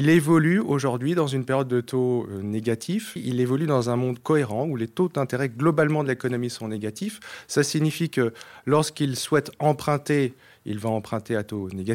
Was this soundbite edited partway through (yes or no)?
yes